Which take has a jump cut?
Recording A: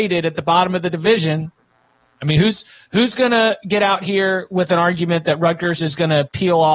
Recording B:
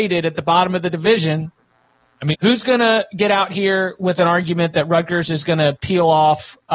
B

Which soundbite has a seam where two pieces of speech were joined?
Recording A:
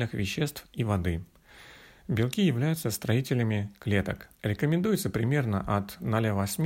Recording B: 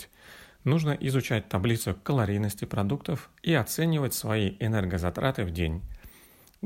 A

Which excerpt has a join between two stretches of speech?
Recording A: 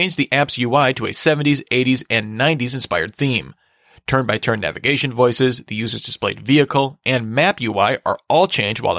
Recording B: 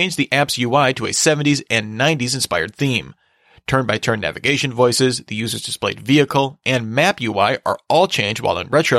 B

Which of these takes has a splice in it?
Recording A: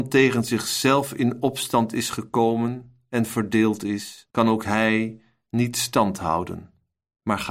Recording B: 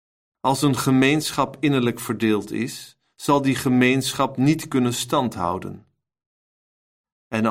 A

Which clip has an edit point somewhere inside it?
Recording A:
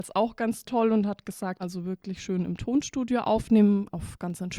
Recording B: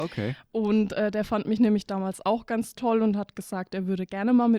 A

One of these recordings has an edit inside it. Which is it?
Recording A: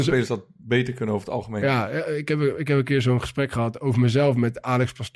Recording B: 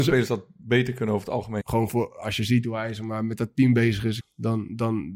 B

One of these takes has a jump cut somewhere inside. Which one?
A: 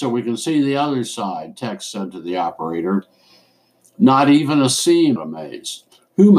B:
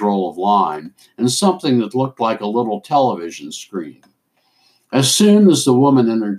A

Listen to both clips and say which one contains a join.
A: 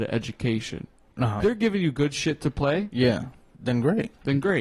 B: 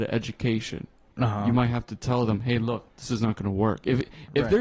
A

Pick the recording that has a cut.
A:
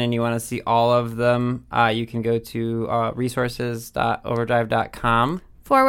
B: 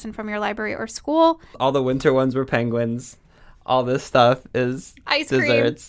B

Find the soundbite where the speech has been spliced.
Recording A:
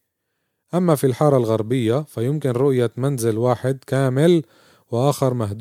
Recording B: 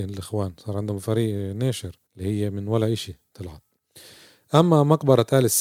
B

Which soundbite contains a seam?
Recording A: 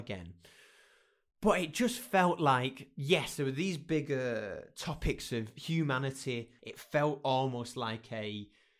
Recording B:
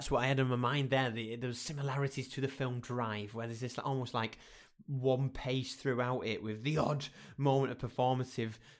A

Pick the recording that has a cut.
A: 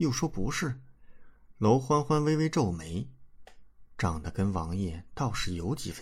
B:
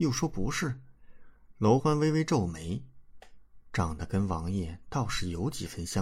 B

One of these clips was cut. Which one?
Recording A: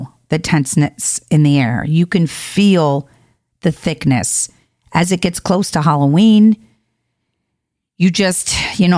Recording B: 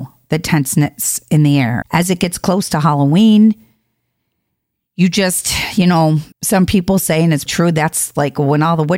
B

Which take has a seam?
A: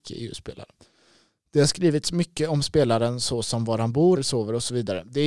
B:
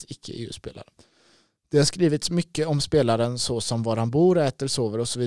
A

